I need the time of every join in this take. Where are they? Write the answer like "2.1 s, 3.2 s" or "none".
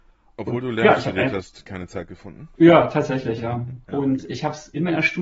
2.5 s, 3.8 s